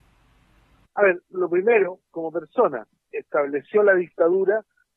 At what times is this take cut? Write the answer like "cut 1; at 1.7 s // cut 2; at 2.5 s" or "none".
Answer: cut 1; at 3.1 s